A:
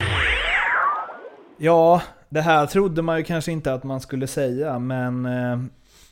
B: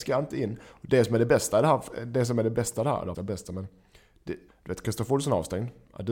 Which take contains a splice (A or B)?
B